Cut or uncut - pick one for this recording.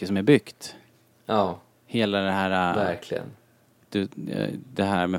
uncut